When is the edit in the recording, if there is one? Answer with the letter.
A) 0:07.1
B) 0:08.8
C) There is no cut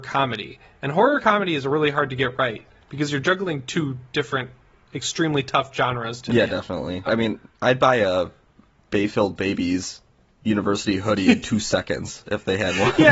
A